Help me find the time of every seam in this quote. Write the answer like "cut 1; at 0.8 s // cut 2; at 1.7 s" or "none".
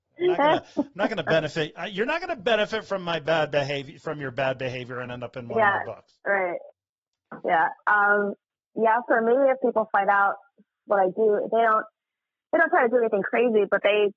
none